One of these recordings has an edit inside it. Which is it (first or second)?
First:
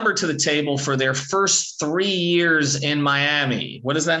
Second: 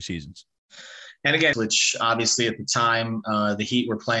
second